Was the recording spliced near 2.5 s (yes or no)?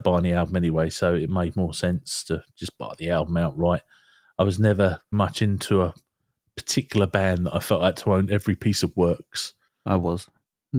no